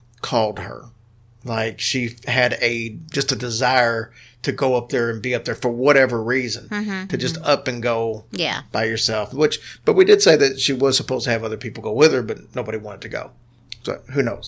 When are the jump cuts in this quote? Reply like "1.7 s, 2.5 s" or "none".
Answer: 7.1 s

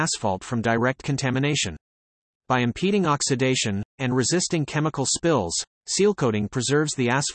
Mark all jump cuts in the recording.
3.9 s

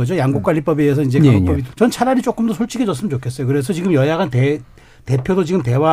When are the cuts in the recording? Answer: 1.7 s

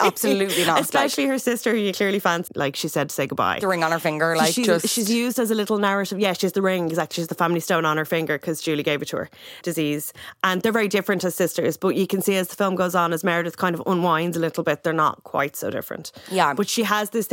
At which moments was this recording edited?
2.5 s, 9.6 s

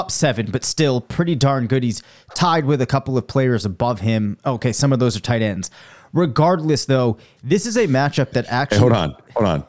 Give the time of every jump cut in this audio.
none

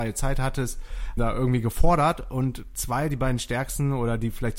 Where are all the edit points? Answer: 1.2 s

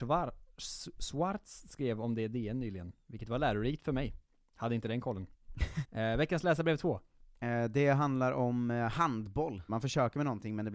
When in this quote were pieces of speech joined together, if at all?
5.8 s, 9.7 s

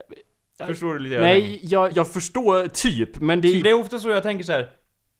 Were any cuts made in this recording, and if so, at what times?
1.9 s, 3.6 s

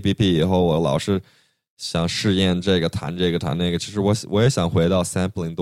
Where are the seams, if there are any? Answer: none

